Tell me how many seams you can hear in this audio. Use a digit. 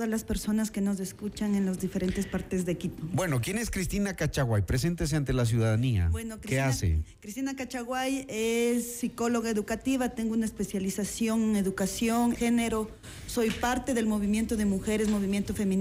1